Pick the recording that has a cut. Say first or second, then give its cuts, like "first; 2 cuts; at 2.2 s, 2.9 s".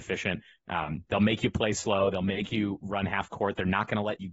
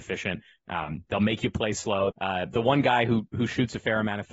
second; 1 cut; at 2.1 s